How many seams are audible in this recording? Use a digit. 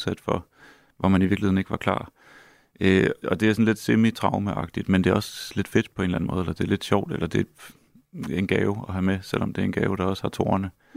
1